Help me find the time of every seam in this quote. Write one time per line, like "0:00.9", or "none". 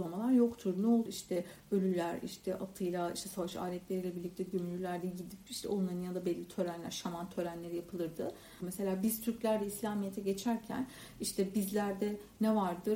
0:01.1
0:08.6